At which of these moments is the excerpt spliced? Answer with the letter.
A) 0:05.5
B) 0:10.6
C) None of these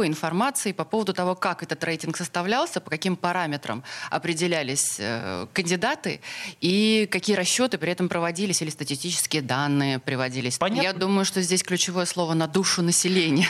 B